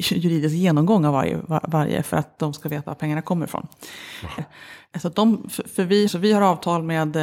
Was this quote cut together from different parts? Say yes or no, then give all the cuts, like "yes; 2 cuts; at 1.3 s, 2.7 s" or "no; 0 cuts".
yes; 2 cuts; at 4.4 s, 6.1 s